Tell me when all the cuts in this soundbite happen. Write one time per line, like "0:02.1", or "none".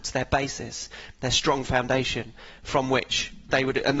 none